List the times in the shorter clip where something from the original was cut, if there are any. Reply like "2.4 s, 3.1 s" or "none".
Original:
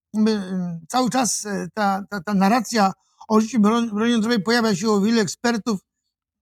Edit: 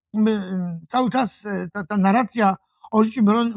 1.7 s